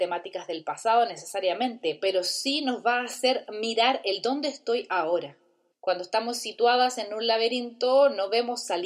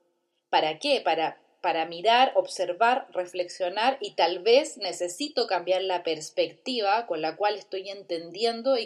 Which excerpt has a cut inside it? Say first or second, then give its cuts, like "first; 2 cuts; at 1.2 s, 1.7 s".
first; 1 cut; at 5.7 s